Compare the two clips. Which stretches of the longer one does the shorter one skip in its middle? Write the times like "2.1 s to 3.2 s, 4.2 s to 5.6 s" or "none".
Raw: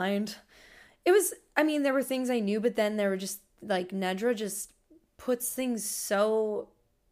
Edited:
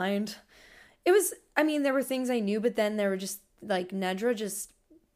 none